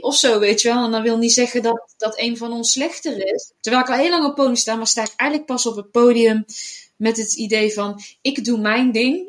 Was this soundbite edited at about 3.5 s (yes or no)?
yes